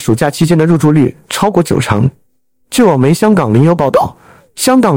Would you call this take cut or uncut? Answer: uncut